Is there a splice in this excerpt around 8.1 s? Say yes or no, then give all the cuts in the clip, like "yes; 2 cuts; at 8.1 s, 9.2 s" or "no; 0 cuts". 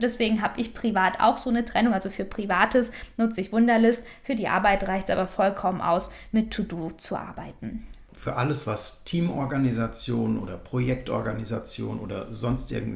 yes; 1 cut; at 8.1 s